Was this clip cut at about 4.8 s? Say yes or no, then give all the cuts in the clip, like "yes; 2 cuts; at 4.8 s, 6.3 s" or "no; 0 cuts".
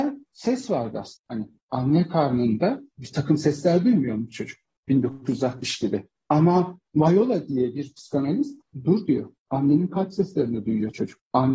yes; 1 cut; at 4.8 s